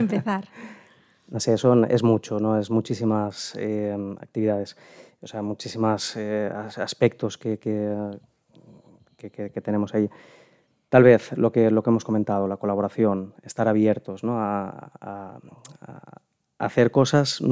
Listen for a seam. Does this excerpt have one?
no; 0 cuts

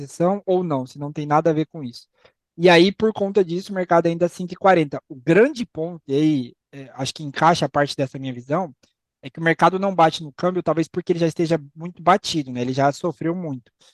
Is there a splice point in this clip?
no; 0 cuts

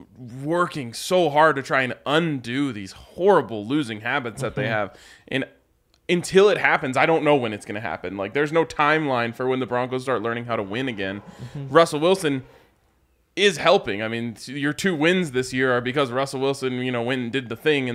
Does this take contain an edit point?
no; 0 cuts

